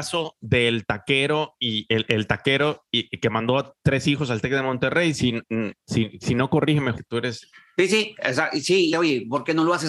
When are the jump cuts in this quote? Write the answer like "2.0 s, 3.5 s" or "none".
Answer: 6.9 s, 8.9 s